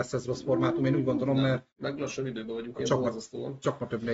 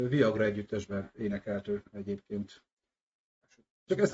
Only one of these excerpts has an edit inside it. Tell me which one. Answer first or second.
first